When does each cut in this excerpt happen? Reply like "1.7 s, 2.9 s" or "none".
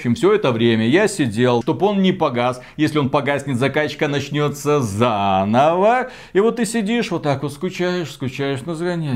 1.6 s